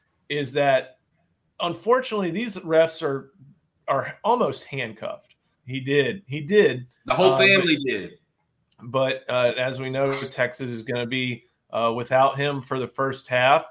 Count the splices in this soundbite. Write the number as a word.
one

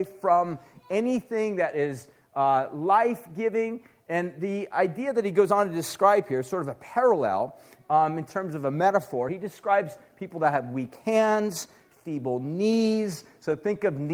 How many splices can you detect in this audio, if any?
zero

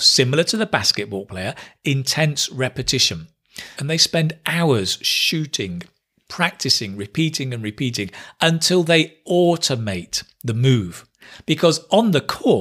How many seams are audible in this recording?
one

